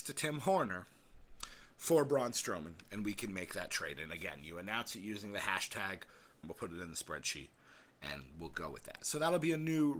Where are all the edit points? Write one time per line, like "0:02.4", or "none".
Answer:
0:06.4